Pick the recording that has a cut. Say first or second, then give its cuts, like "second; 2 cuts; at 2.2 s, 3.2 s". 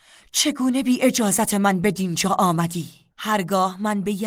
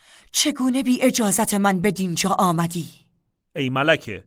first; 1 cut; at 3.1 s